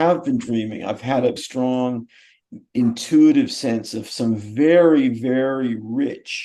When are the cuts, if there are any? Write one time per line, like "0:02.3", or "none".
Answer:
0:01.4

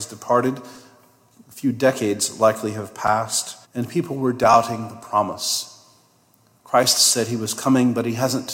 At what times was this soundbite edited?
0:03.6

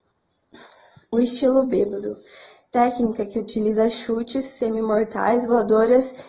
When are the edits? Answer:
none

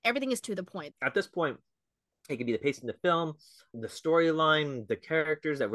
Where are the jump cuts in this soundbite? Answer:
0:00.9
0:03.7

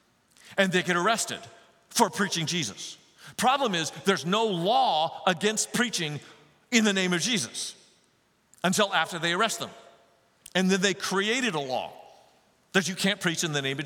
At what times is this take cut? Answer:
none

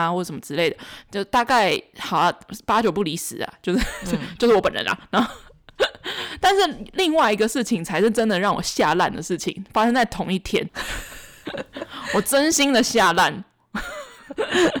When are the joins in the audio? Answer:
none

